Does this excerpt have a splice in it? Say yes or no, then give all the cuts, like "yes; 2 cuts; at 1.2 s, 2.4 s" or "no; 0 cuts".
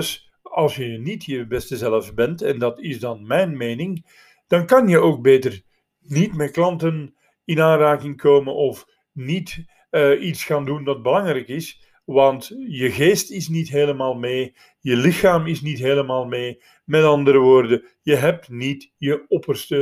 no; 0 cuts